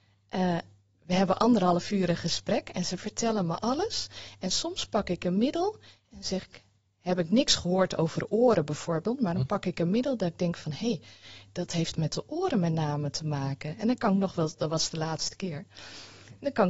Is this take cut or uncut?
uncut